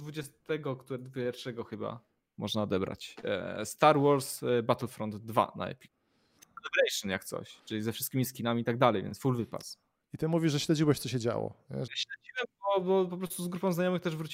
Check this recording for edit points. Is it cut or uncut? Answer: cut